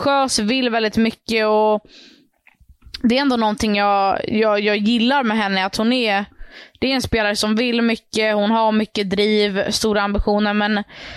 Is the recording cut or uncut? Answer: uncut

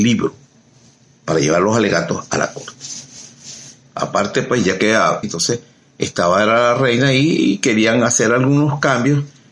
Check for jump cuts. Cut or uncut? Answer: cut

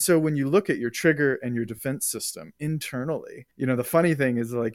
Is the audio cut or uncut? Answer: cut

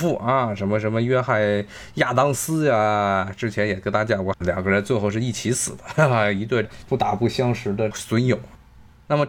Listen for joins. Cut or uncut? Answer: cut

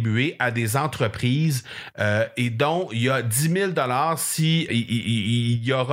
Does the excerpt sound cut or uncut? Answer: cut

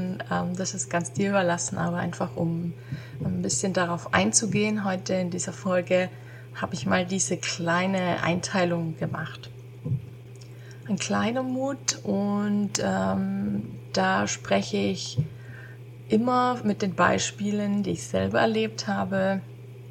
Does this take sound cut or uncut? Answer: uncut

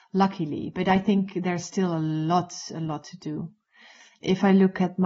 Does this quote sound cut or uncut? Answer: uncut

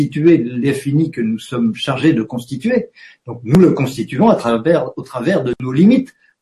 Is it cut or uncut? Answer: uncut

